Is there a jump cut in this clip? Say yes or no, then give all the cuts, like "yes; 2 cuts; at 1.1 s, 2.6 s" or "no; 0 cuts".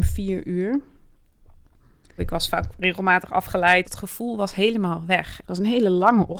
yes; 3 cuts; at 2.2 s, 3.8 s, 5.4 s